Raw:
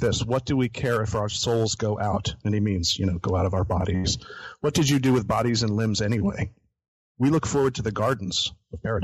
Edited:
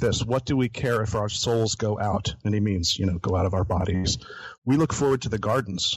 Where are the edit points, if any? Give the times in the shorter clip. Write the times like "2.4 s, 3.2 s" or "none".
4.6 s